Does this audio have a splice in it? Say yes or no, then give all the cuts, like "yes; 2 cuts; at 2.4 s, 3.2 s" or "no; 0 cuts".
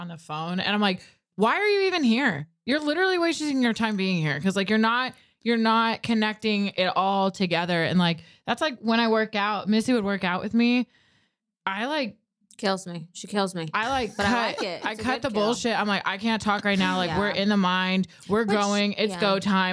no; 0 cuts